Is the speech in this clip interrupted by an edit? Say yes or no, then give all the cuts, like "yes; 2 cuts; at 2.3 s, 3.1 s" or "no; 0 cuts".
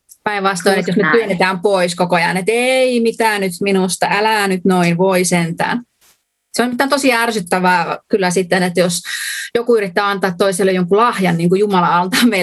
no; 0 cuts